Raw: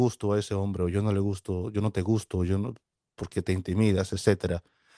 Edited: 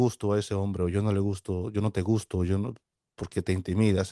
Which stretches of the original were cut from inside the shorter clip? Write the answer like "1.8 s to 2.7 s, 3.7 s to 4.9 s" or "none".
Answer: none